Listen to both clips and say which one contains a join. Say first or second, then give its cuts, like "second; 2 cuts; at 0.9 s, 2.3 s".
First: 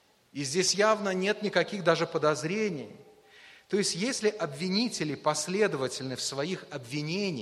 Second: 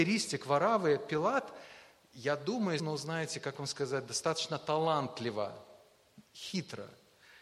second; 1 cut; at 2.8 s